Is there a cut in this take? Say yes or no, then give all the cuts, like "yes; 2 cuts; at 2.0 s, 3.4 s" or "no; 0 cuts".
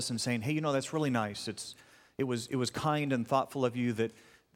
no; 0 cuts